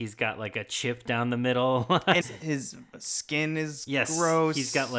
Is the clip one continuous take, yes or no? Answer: no